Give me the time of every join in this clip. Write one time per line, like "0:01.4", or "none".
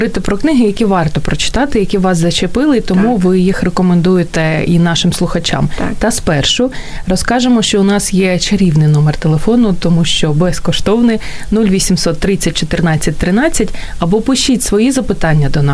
none